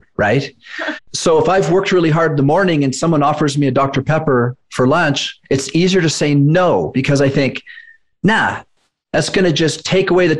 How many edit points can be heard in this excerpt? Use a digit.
1